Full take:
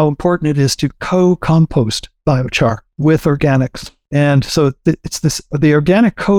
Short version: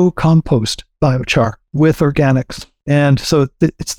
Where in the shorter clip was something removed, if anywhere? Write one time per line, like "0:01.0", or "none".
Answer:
none